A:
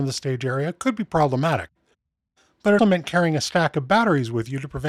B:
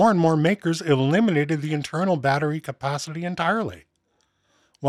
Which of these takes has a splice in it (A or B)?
A